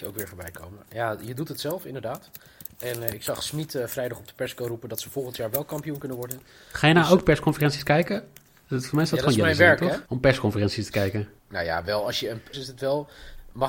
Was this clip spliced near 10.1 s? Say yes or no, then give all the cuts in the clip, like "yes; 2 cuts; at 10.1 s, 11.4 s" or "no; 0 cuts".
yes; 3 cuts; at 10.1 s, 11.4 s, 12.5 s